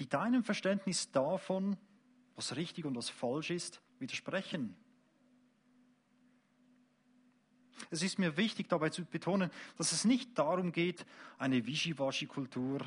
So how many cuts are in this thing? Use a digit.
1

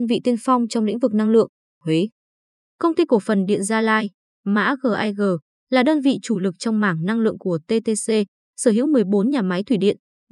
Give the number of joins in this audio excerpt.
1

